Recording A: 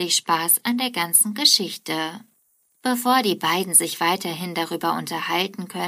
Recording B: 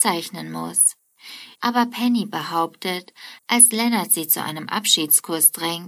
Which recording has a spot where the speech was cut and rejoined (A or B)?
B